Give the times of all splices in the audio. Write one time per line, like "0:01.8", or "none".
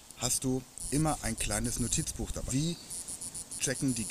0:02.5